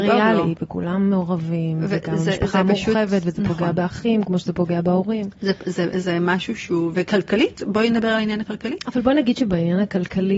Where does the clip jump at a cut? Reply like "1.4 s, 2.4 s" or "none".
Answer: none